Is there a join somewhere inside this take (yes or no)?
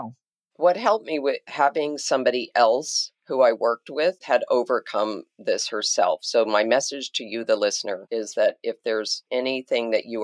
yes